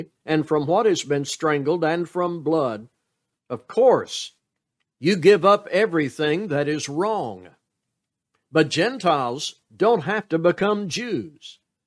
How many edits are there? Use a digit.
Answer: 1